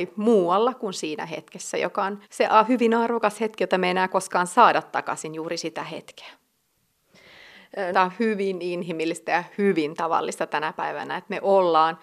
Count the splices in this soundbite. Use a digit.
2